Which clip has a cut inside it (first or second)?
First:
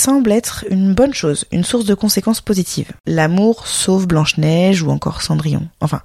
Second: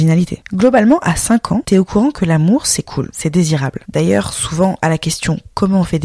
second